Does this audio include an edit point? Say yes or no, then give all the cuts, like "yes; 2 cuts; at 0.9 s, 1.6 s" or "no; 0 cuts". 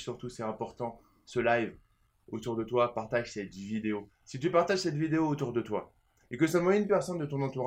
no; 0 cuts